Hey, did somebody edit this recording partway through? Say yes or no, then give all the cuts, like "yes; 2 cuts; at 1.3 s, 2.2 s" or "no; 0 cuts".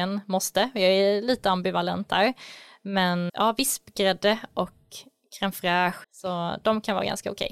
yes; 2 cuts; at 3.3 s, 6.0 s